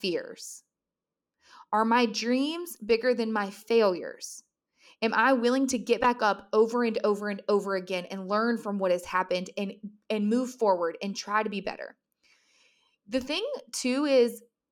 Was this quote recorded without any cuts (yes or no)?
yes